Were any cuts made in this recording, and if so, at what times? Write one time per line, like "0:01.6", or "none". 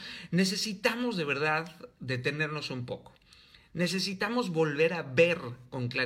none